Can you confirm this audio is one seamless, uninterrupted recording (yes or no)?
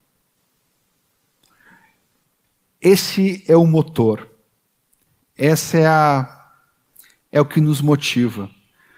yes